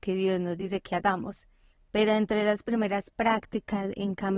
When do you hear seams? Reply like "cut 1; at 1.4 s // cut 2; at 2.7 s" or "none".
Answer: cut 1; at 1.7 s